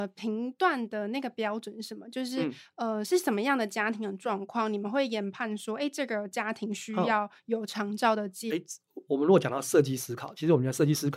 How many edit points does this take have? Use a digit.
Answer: 1